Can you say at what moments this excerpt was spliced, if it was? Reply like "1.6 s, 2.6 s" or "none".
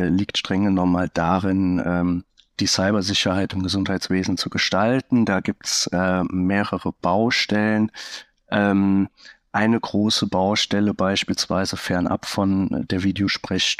none